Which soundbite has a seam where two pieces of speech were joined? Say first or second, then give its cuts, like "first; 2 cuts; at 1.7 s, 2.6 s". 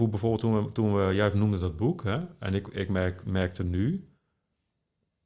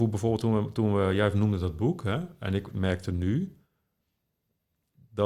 second; 1 cut; at 2.7 s